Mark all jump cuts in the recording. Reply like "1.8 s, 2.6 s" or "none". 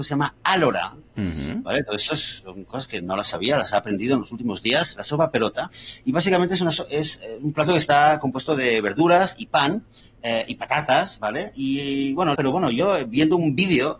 12.3 s